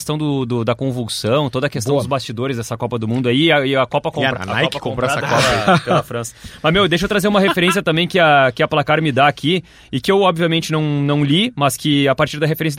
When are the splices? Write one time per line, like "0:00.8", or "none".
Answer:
0:04.3